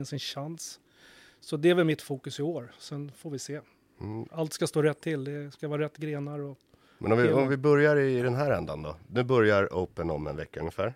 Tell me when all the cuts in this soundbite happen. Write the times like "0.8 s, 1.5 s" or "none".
none